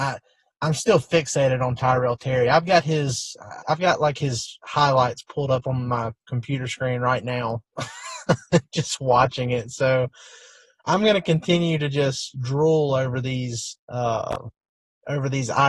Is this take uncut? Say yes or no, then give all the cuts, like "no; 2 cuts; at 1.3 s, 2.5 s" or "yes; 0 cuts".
no; 3 cuts; at 3.6 s, 12.3 s, 13.8 s